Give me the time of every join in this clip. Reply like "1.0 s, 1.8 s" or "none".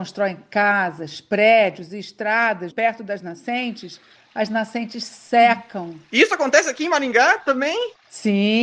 2.7 s, 4.1 s

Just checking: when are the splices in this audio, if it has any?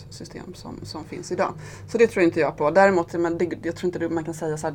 none

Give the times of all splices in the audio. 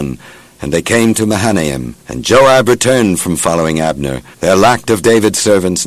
2.0 s, 4.3 s

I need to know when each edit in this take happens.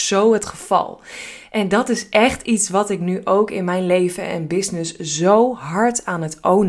none

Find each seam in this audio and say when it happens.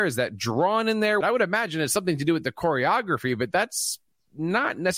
1.2 s

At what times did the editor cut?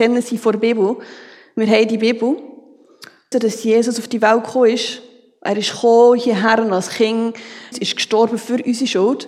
3.3 s, 7.7 s

